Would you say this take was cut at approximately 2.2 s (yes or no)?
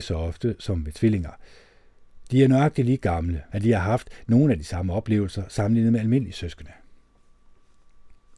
yes